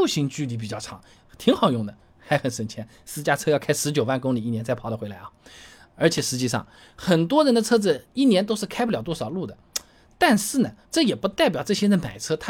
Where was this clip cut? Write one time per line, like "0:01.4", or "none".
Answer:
0:01.2
0:10.8